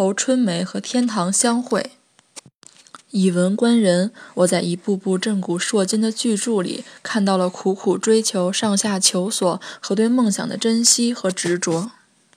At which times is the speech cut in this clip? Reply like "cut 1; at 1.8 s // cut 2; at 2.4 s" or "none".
none